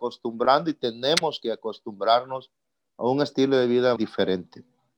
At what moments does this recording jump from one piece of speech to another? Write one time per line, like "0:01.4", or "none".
0:04.0